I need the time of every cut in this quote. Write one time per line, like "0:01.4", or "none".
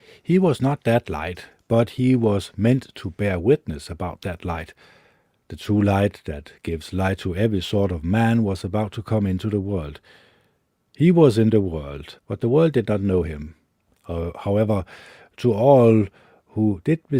0:12.2
0:13.9